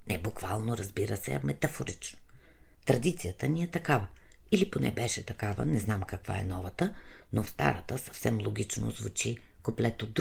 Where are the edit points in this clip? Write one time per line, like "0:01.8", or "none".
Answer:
none